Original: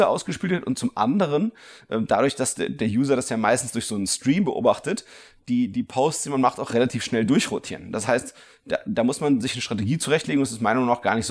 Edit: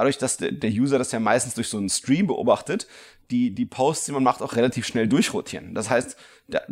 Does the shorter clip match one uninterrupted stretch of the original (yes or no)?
yes